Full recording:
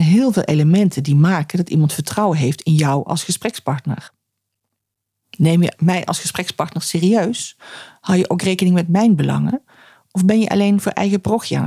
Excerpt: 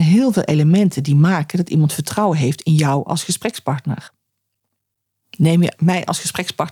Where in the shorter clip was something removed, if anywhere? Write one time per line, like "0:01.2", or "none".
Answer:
none

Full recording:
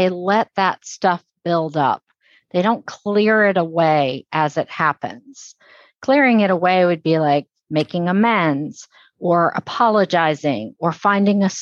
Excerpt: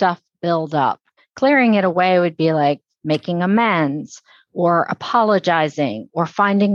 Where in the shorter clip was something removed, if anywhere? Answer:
0:01.2

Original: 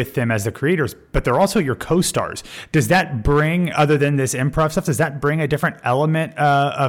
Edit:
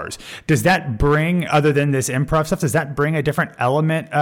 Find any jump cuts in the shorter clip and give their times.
none

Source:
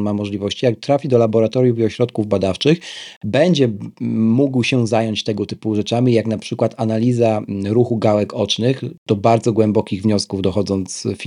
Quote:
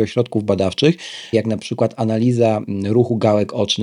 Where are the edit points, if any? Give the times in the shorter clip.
0:01.3

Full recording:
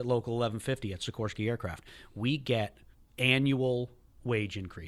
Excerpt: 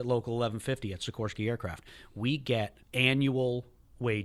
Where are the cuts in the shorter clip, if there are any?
0:02.8

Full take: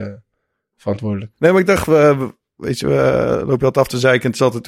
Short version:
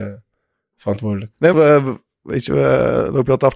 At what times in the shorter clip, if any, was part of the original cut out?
0:01.5

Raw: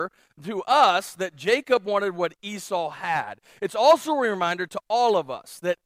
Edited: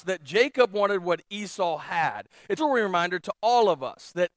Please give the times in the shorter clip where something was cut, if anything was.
0:02.6

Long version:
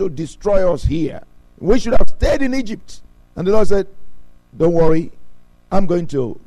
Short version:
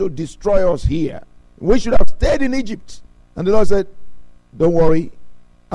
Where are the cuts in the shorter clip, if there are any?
none

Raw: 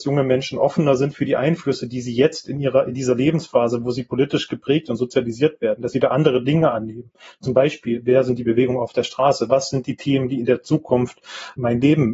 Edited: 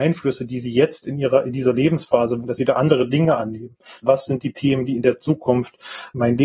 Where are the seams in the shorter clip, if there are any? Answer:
0:02.4
0:04.0

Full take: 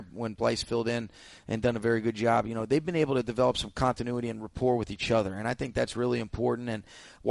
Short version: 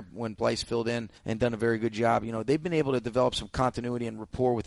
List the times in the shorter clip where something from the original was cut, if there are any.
0:01.2

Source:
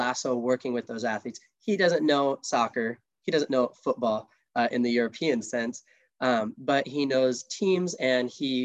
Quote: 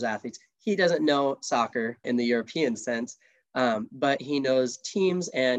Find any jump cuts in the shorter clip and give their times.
0:02.0

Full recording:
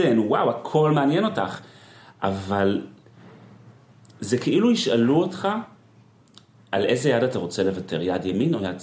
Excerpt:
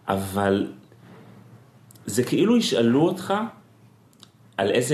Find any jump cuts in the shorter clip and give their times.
none

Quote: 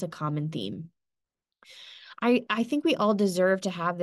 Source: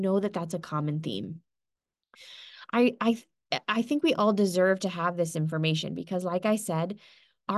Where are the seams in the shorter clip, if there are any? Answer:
0:02.5

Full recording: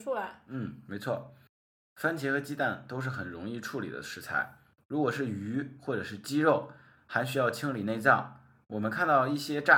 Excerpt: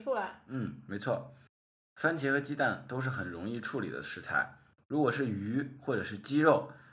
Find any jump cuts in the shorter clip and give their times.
none

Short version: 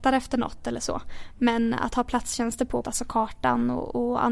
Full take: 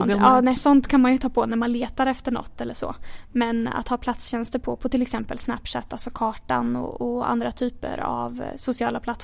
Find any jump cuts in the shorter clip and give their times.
0:02.8

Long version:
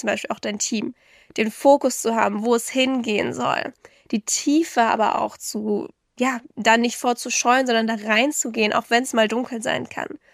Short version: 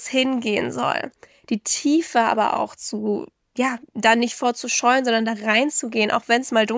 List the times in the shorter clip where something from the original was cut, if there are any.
none

